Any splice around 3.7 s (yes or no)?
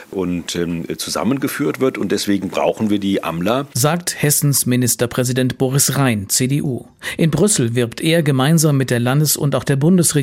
no